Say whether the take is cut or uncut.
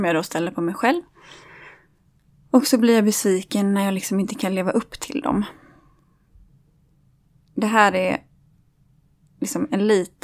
uncut